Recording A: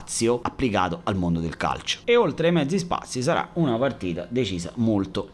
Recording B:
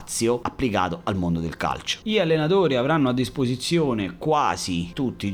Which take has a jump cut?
B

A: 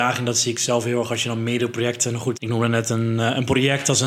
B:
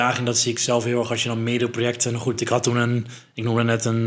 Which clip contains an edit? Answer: A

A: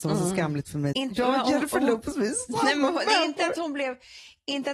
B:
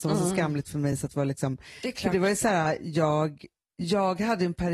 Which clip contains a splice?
A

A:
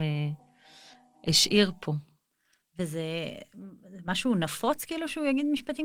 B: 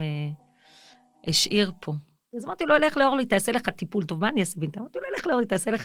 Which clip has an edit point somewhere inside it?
B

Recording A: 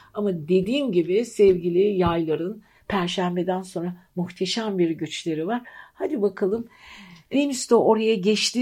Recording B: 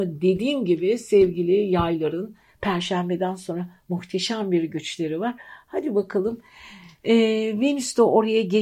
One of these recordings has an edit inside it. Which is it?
A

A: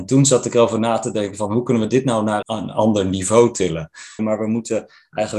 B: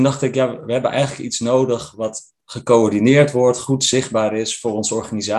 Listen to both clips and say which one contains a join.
A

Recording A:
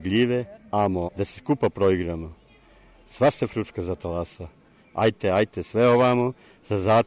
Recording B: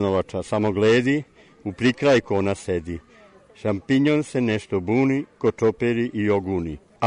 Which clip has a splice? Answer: A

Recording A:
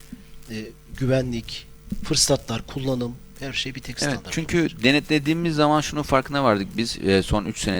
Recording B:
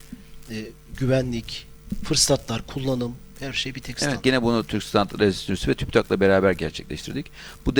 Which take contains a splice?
B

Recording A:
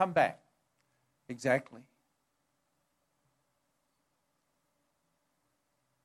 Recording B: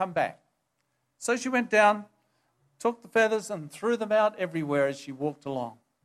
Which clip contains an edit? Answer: A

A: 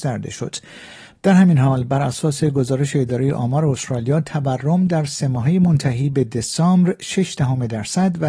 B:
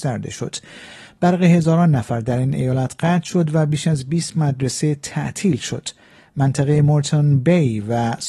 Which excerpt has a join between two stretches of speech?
A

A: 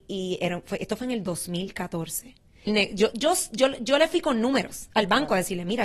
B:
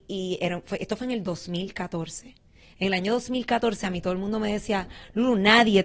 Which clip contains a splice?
A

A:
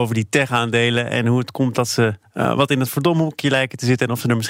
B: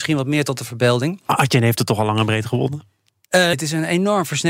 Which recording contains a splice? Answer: B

